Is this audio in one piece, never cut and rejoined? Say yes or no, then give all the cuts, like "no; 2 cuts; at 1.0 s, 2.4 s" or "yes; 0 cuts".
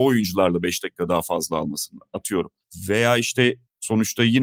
yes; 0 cuts